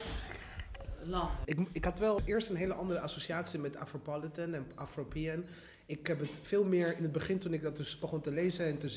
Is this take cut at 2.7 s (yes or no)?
no